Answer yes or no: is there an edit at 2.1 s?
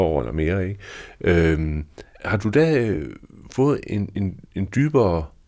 yes